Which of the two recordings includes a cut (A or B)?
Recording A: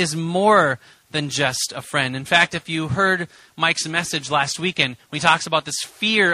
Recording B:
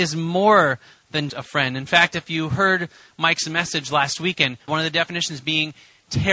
B